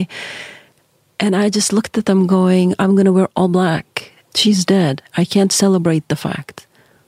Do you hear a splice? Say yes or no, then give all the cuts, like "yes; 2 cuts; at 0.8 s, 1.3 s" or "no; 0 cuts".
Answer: yes; 1 cut; at 4.2 s